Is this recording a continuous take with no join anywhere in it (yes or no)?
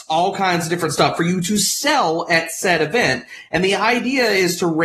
yes